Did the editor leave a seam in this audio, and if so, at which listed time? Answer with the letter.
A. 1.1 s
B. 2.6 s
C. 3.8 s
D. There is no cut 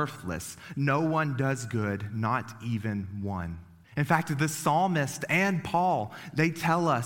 C